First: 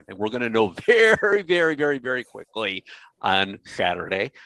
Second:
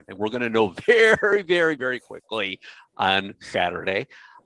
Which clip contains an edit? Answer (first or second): second